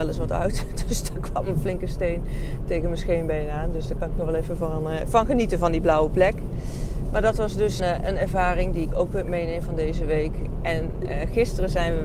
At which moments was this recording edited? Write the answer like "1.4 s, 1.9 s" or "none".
7.8 s